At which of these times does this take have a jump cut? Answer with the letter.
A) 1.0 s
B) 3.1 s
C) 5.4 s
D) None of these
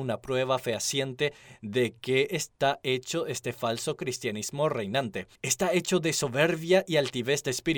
C